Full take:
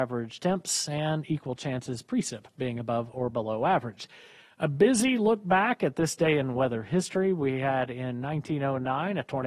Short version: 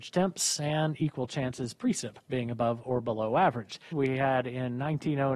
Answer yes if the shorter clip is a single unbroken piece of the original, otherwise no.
no